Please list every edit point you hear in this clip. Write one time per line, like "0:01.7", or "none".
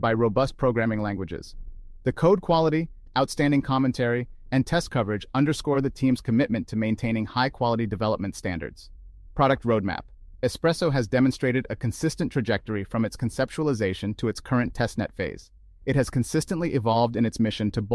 none